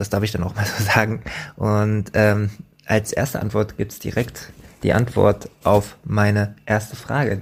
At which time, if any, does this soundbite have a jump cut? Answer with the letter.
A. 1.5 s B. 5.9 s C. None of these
C